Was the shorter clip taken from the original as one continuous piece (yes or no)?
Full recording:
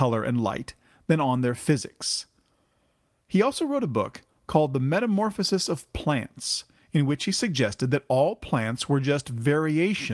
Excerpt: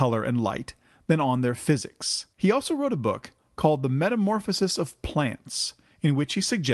no